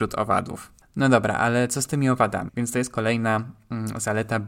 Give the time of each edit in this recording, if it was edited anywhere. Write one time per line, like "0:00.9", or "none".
0:02.5